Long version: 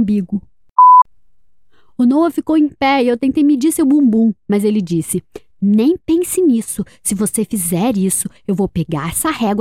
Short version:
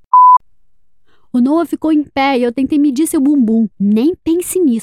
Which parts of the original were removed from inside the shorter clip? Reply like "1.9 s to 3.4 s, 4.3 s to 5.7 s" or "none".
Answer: 4.4 s to 5.5 s